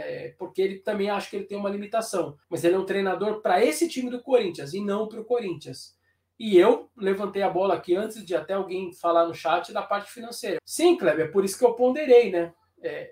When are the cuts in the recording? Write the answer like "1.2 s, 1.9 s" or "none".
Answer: 2.4 s, 10.6 s